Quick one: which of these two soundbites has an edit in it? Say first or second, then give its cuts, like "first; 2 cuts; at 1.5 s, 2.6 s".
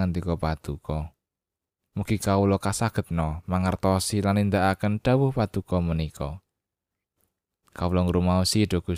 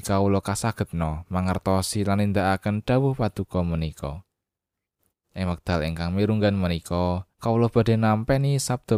second; 2 cuts; at 5.1 s, 7.3 s